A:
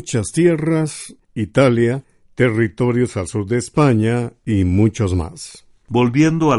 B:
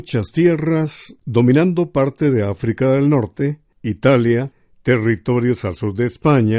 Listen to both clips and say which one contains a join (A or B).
A